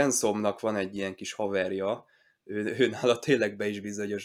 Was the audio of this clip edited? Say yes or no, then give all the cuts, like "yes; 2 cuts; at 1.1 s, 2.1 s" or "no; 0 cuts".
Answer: no; 0 cuts